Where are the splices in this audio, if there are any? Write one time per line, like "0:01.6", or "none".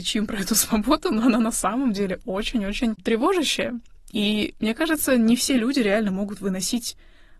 none